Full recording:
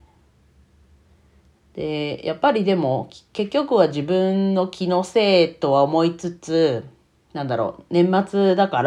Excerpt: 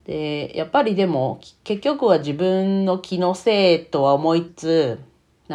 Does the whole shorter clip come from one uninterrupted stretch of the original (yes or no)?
no